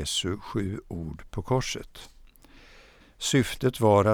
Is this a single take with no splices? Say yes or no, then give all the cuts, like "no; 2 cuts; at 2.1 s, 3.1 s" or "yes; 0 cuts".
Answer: no; 1 cut; at 3.0 s